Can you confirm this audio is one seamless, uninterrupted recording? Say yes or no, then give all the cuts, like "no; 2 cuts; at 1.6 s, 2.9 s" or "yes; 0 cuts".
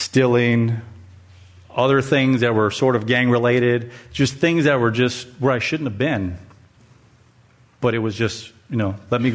yes; 0 cuts